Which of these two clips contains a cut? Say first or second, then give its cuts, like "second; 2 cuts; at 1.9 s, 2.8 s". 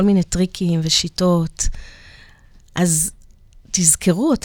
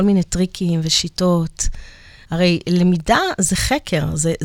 second; 1 cut; at 2.2 s